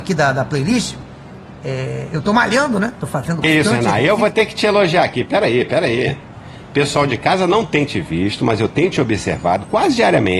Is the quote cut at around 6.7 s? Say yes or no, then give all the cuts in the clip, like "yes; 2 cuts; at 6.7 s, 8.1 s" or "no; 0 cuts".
no; 1 cut; at 3.4 s